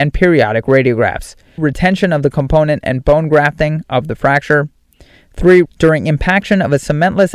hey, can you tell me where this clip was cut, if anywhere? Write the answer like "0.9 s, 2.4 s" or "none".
1.6 s, 5.6 s